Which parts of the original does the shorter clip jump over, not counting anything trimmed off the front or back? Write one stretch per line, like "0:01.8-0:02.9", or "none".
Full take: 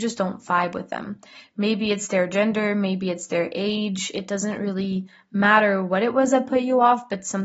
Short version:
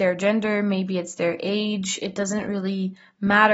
none